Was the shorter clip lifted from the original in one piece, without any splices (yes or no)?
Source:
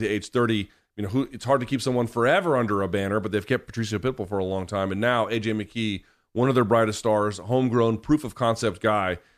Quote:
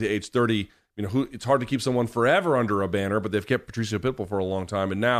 yes